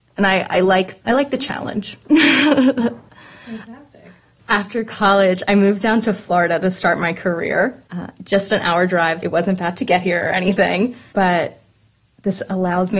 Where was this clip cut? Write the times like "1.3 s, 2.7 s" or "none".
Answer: 1.0 s, 7.9 s, 9.2 s

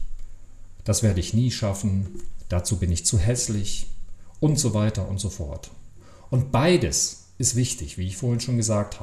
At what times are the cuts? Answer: 6.3 s

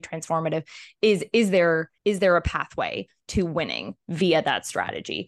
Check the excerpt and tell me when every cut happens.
2.0 s

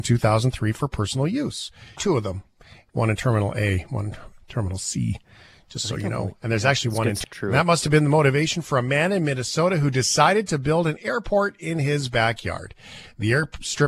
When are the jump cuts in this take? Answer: 2.0 s, 7.2 s

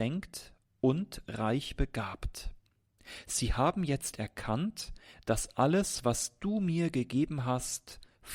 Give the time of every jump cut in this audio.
none

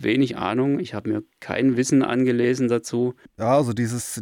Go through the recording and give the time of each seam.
3.3 s

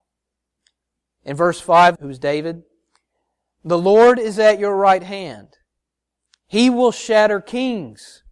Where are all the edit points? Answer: 1.9 s

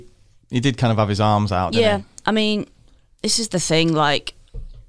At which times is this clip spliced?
none

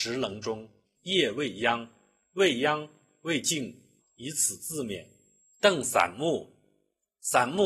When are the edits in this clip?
1.0 s, 4.0 s

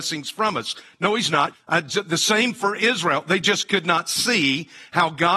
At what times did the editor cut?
1.5 s

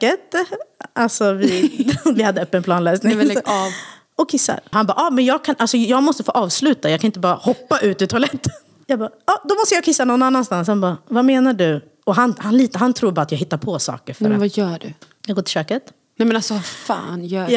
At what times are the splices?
4.7 s

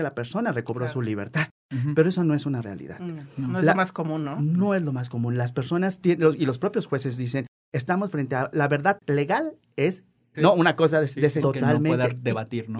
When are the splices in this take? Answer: 10.3 s, 11.4 s

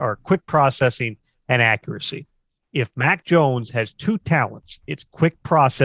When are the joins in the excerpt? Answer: none

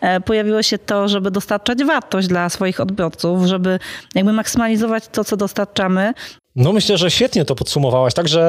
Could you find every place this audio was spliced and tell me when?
6.4 s

